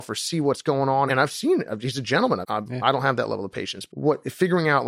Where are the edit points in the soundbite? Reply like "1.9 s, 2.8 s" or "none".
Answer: 1.1 s, 2.4 s, 3.9 s